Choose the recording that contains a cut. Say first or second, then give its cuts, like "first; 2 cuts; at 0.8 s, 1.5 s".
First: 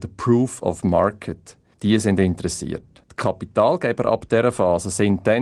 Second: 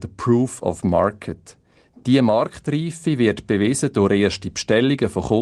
first; 2 cuts; at 1.7 s, 3.0 s